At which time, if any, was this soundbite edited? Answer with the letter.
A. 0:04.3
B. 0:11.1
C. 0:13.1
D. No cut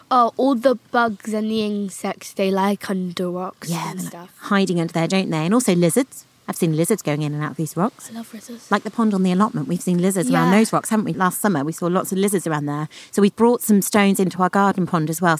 B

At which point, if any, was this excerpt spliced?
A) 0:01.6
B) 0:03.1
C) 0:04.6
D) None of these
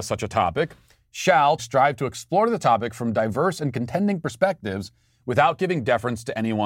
A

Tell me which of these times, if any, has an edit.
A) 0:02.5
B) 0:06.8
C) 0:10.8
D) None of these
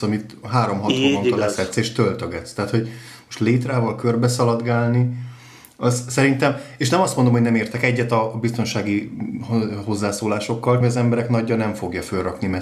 C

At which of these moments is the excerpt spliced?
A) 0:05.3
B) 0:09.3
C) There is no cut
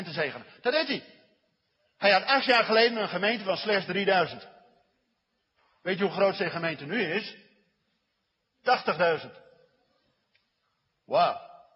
C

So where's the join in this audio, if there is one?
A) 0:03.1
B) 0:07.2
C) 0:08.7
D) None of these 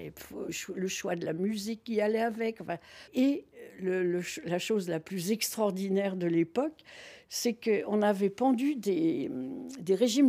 A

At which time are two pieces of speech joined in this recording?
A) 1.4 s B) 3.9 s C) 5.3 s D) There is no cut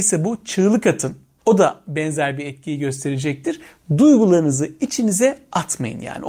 A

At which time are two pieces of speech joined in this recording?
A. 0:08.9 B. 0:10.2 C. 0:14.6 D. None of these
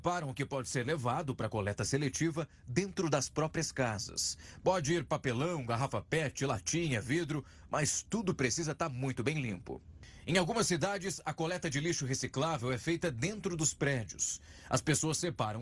D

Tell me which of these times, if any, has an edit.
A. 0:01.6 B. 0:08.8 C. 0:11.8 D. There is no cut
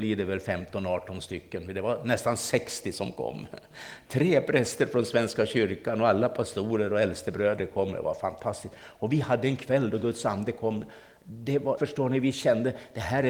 C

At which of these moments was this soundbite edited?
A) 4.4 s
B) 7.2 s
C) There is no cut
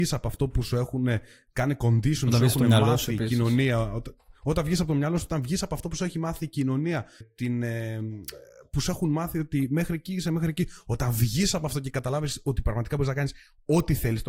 B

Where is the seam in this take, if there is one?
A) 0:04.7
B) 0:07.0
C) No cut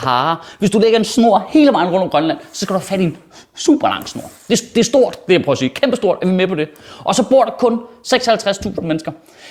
C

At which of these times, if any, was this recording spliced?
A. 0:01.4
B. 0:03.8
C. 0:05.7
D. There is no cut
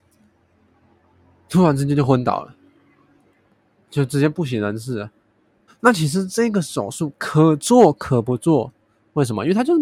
C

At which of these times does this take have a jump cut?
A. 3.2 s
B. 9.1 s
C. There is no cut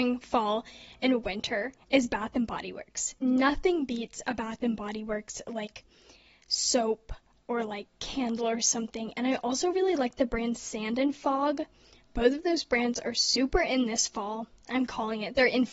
A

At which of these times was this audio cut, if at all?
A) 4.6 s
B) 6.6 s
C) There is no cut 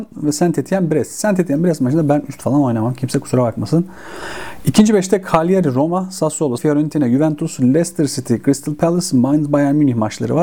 B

